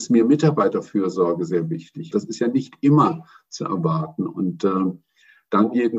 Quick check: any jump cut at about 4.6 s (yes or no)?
no